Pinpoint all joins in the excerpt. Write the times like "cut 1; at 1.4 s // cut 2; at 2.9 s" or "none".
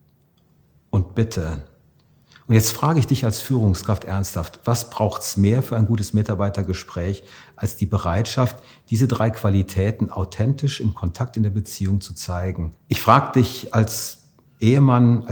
cut 1; at 12.8 s